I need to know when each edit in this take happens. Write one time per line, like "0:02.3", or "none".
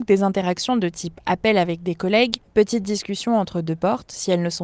0:02.5